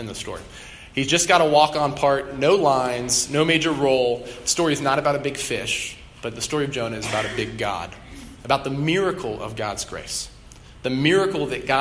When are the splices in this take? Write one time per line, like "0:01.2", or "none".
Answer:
none